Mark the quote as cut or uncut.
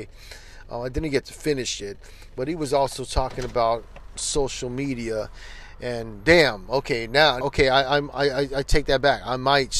cut